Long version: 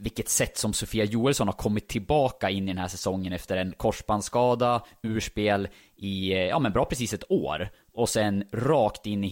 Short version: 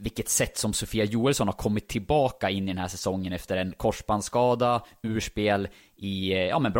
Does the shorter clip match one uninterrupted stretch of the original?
yes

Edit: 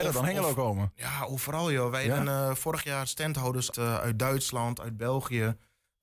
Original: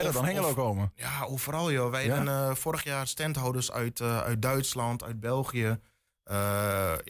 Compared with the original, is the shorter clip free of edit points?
no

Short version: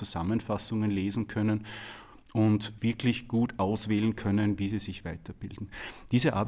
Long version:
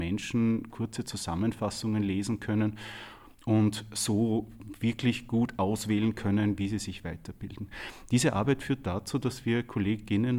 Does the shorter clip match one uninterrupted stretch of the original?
no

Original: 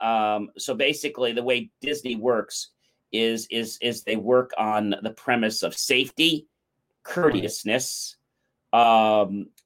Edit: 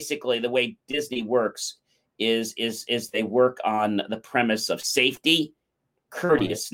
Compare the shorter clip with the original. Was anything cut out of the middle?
no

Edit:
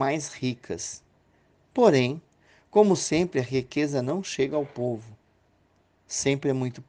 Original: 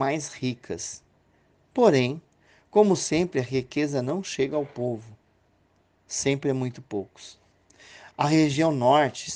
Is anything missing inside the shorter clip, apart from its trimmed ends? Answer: no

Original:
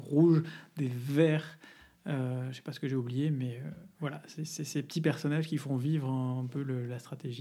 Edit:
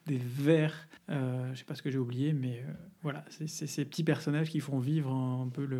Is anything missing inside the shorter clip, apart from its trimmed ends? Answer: yes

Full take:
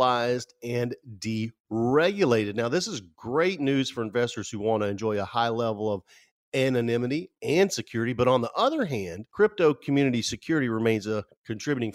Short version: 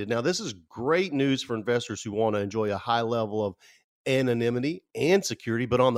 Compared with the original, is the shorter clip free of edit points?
yes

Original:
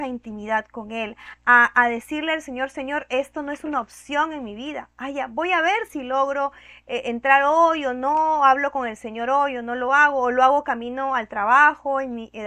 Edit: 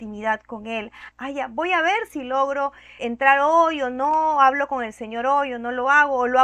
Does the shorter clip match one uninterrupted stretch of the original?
no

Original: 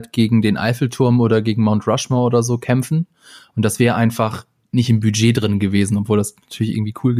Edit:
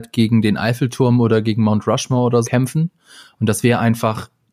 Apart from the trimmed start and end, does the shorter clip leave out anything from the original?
yes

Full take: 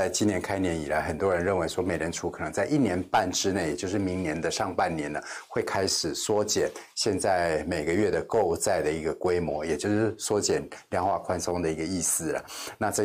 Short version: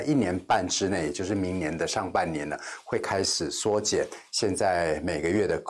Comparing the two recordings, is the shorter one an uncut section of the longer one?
yes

